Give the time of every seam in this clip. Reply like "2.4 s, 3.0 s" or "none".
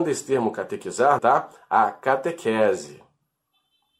1.2 s